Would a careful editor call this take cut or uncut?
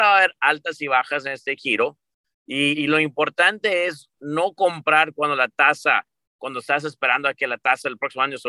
cut